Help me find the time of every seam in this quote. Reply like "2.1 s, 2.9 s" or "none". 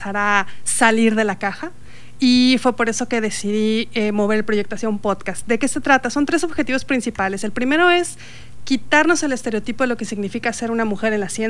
none